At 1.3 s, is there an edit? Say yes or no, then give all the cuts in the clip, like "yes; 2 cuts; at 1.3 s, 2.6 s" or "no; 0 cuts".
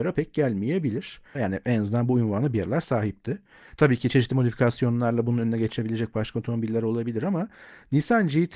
yes; 1 cut; at 1.3 s